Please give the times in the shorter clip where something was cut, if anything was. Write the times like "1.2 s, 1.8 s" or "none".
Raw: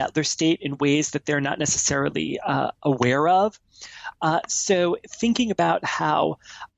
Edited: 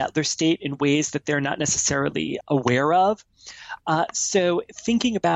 2.4 s